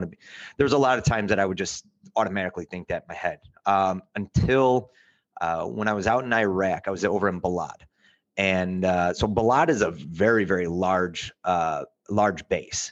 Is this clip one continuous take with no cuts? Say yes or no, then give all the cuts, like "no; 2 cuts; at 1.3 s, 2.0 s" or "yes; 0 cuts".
yes; 0 cuts